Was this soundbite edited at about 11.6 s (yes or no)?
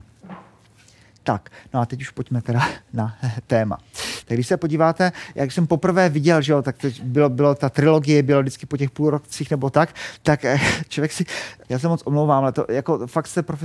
yes